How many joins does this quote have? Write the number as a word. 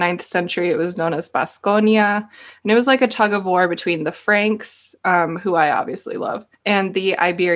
one